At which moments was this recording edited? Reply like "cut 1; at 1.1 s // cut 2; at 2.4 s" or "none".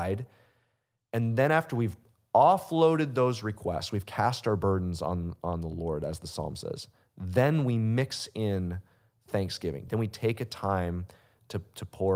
none